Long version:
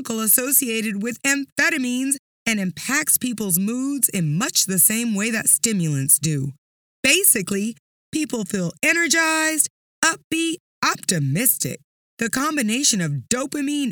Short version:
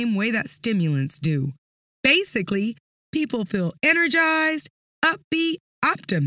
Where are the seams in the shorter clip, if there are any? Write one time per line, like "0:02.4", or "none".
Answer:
none